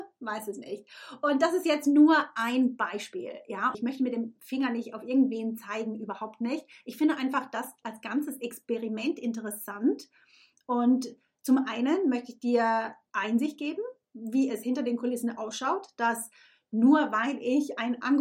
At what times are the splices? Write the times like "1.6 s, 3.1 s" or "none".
3.7 s